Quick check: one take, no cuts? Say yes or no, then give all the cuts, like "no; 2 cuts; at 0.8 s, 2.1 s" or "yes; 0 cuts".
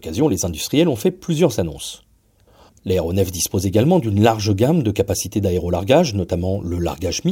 no; 1 cut; at 2.7 s